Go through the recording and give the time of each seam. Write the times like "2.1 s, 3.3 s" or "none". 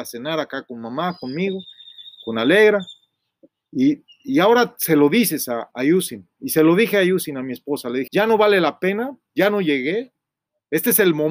5.7 s, 8.1 s